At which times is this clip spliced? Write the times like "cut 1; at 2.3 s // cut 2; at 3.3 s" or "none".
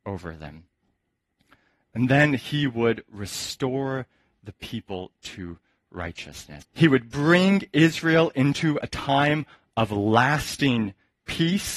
cut 1; at 6.6 s